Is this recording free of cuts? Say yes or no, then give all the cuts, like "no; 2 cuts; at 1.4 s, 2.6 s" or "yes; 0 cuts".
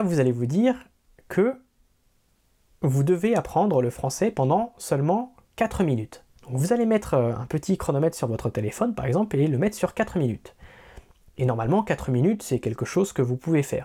no; 1 cut; at 6.4 s